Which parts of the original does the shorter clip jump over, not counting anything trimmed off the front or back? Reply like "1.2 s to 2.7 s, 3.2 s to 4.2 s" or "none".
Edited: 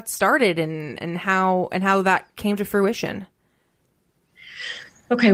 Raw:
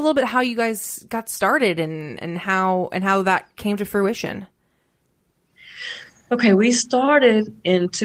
none